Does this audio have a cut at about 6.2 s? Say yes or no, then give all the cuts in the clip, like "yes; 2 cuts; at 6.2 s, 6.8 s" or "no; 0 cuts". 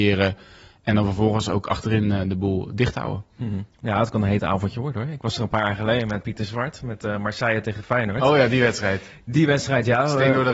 yes; 1 cut; at 6.2 s